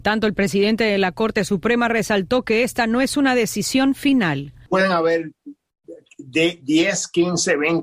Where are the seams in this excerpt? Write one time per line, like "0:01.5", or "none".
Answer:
none